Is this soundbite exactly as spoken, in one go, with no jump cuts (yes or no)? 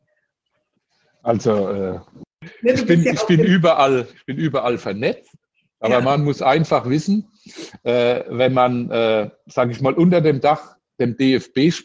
yes